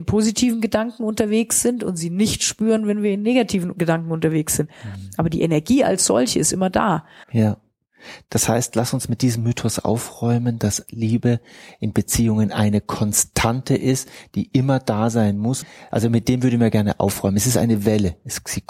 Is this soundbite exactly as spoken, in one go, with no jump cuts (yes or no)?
no